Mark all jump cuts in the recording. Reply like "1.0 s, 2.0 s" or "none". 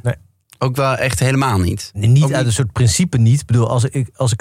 none